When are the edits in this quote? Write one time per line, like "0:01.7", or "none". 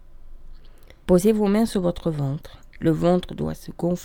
0:01.0
0:02.7